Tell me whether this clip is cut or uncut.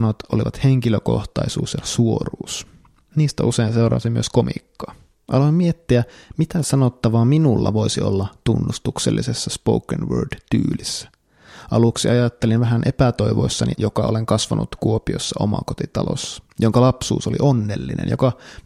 cut